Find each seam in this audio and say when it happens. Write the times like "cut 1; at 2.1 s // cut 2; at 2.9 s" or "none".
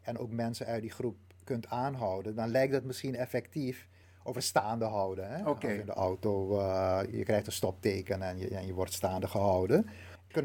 cut 1; at 4.0 s